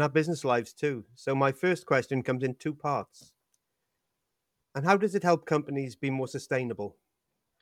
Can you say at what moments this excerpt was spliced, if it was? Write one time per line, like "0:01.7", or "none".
0:04.6